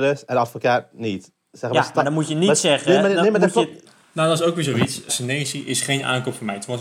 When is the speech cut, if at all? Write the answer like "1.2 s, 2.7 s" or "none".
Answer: 3.8 s, 5.1 s